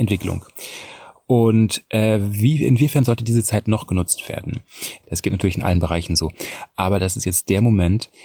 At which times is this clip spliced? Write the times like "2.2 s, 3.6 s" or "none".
5.0 s